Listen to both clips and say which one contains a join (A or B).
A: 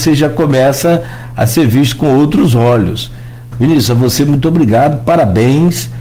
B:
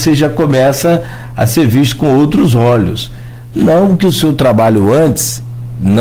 A